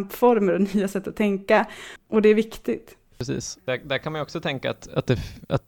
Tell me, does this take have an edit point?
yes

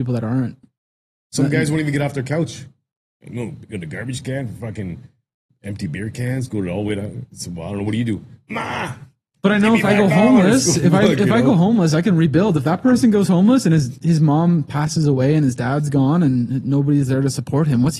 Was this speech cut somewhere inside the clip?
no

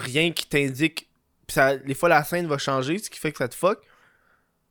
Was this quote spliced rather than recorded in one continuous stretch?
no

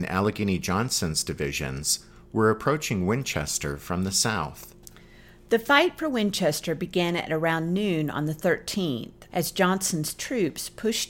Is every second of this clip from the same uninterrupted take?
no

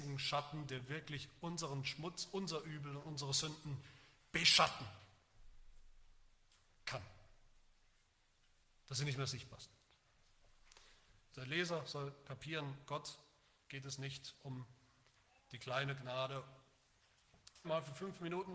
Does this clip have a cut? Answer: yes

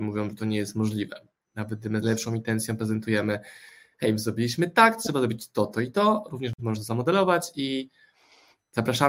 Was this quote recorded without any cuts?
yes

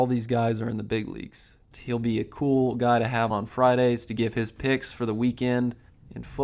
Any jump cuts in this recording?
yes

